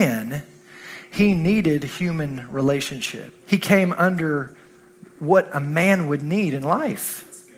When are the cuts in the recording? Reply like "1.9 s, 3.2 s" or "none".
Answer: 3.4 s